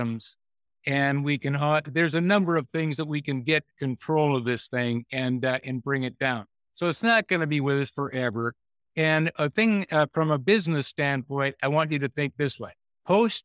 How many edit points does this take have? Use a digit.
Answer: 0